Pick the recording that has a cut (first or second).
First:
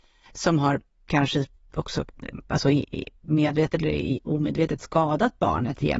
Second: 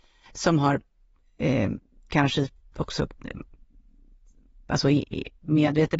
first